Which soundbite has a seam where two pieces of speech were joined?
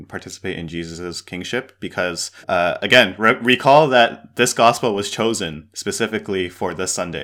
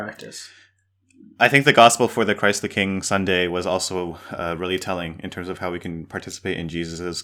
first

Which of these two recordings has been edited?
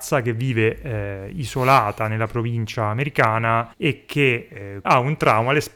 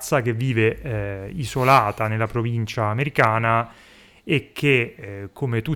first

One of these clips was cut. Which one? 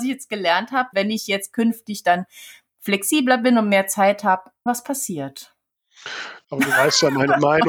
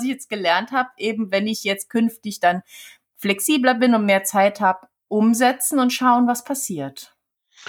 first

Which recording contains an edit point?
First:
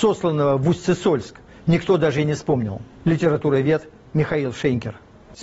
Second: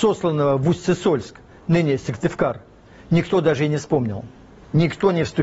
first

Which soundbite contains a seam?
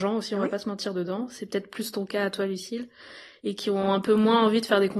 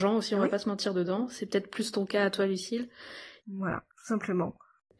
second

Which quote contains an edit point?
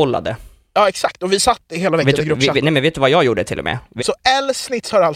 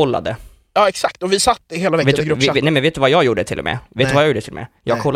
first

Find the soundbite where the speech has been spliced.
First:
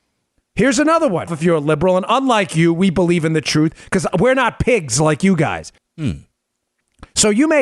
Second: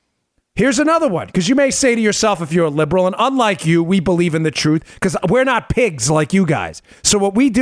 first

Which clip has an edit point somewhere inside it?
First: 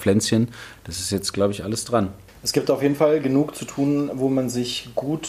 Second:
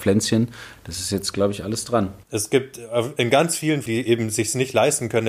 second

